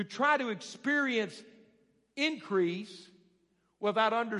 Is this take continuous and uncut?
yes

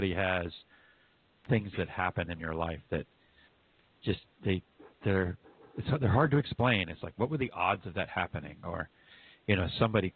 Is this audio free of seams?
yes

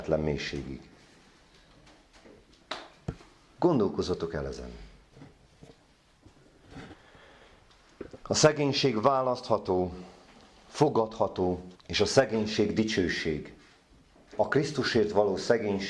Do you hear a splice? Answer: yes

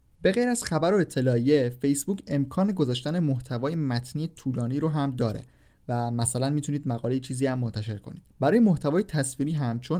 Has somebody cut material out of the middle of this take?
yes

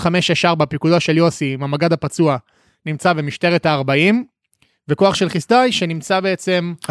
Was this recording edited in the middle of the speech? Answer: no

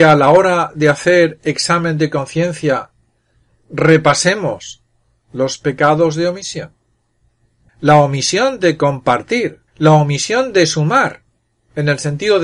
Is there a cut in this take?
yes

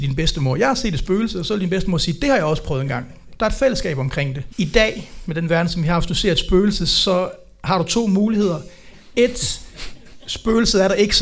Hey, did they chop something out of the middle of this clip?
yes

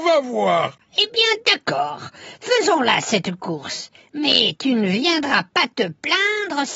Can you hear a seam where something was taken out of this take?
no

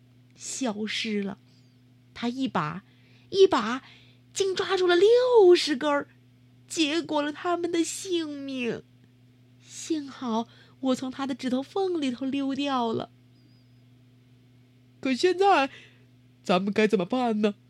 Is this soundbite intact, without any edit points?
yes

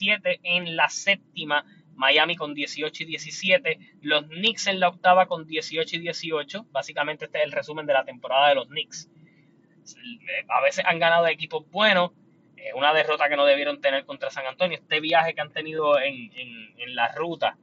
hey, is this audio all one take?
yes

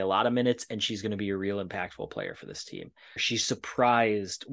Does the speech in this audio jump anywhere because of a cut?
yes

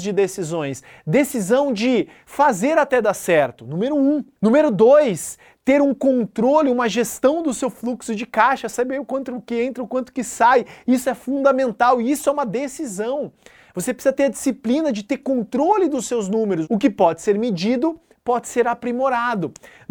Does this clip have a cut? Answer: no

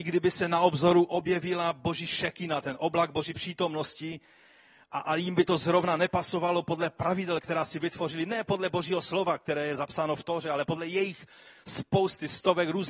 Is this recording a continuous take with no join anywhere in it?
yes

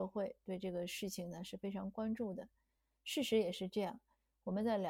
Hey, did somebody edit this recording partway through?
no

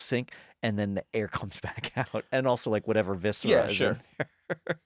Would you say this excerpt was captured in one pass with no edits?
yes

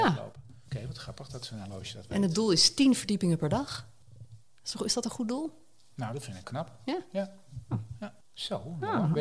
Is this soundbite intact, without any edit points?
no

